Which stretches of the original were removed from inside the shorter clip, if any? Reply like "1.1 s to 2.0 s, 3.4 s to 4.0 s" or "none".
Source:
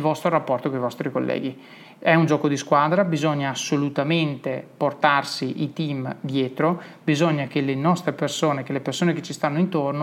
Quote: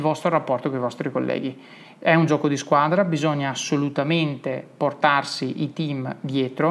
none

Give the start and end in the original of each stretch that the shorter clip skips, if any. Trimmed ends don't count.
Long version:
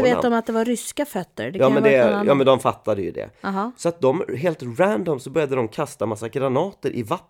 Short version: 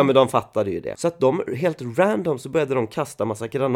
3.2 s to 3.7 s

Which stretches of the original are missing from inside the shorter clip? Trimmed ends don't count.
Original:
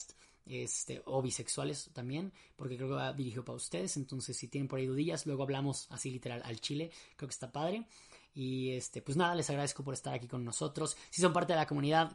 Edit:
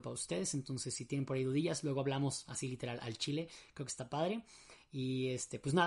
none

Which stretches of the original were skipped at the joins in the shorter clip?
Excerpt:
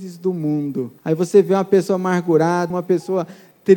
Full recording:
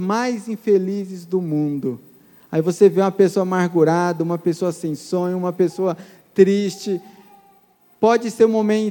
2.1 s to 2.4 s, 4.2 s to 5.4 s

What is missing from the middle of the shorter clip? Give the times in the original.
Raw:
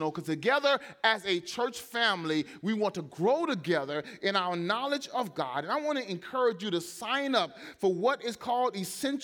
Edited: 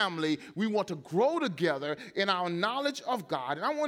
none

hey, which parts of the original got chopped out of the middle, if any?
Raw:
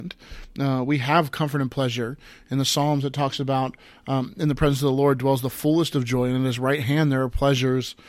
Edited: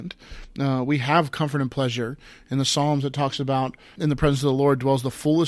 4.0 s to 4.3 s

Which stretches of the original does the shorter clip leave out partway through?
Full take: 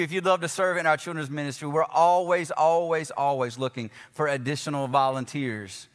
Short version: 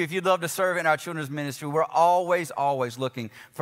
2.5 s to 3.1 s

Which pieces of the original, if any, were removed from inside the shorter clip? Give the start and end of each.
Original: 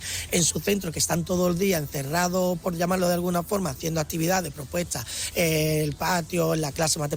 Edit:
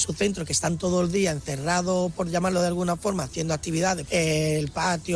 4.5 s to 5.3 s

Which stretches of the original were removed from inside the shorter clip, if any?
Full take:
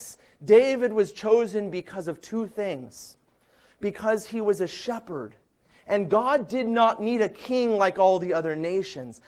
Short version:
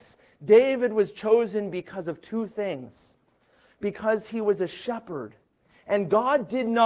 none

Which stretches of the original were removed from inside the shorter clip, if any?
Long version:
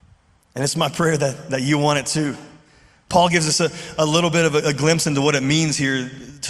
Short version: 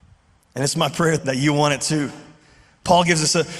1.2 s to 1.4 s

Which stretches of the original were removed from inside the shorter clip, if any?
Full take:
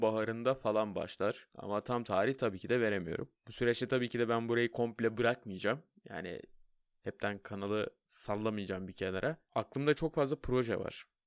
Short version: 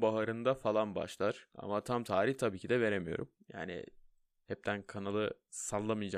3.4 s to 5.9 s

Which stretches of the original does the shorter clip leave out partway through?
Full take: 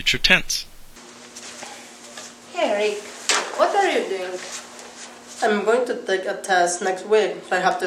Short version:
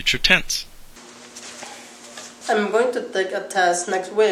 2.4 s to 5.3 s

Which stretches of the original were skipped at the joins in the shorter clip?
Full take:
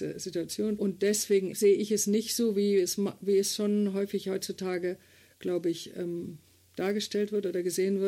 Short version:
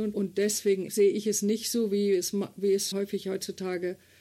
3.6 s to 3.9 s

